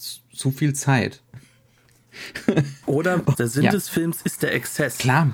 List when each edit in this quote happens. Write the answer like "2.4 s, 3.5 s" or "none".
3.3 s